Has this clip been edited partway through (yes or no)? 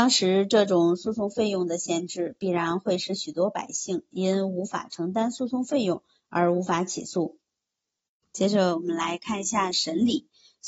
no